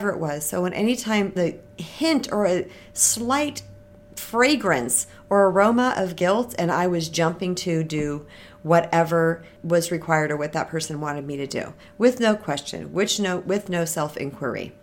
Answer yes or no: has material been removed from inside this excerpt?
yes